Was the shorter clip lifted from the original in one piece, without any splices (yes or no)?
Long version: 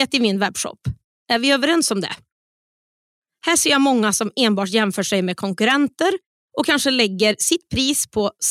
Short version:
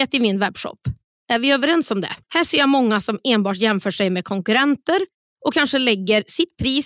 no